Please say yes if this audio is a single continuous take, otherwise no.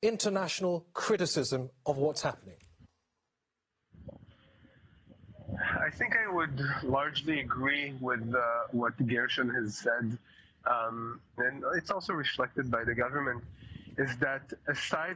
no